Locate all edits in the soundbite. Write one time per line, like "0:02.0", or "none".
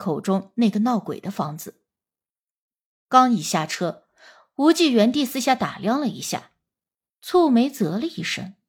none